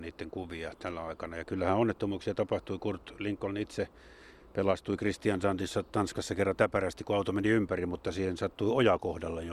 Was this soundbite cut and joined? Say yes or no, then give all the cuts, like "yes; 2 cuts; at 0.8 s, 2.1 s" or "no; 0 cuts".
no; 0 cuts